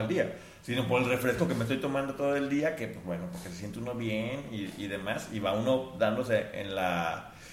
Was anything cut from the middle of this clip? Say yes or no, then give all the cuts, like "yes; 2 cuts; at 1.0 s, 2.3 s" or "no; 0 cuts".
no; 0 cuts